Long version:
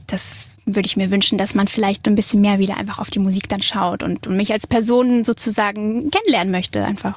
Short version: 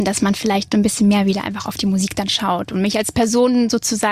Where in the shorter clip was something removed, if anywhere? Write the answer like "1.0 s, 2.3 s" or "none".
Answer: 2.6 s